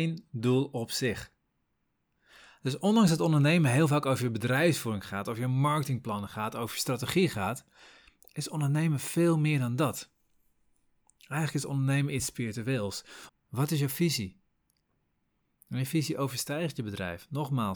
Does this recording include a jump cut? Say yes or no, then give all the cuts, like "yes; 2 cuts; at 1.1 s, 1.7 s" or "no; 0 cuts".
yes; 1 cut; at 13.3 s